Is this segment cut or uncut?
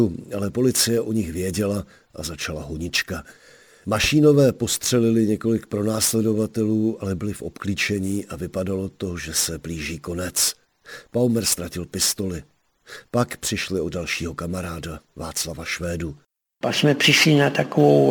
uncut